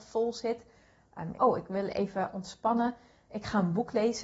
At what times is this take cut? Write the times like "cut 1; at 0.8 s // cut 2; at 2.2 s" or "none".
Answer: cut 1; at 1.3 s